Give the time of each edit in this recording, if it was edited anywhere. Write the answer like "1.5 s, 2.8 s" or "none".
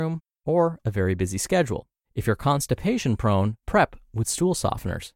2.0 s, 3.6 s